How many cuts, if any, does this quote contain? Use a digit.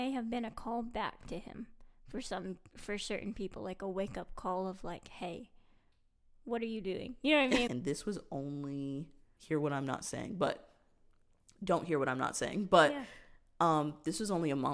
2